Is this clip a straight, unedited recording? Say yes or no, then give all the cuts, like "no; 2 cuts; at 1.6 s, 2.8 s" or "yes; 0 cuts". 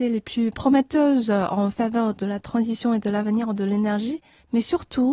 yes; 0 cuts